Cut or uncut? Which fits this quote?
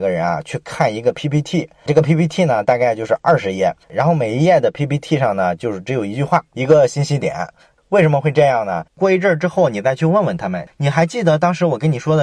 cut